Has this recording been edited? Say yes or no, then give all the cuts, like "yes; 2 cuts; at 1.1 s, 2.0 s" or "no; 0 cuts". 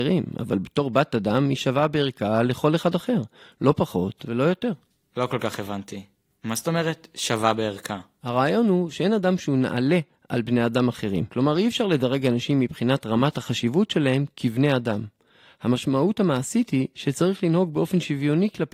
no; 0 cuts